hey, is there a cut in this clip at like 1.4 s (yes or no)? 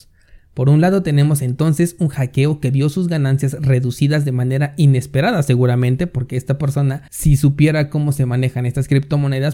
no